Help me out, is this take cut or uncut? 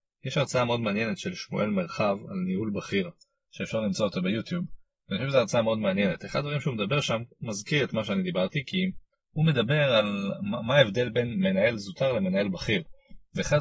uncut